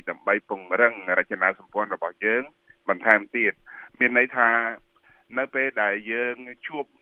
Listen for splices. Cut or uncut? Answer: uncut